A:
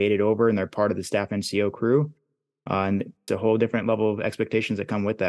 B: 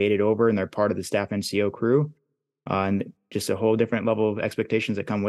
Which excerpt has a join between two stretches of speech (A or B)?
A